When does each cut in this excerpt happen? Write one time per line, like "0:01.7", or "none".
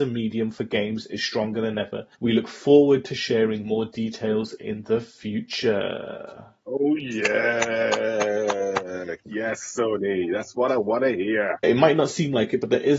0:02.1
0:11.6